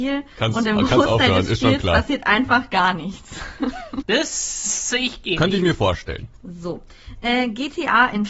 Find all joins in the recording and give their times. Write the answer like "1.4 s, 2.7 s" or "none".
4.0 s, 6.3 s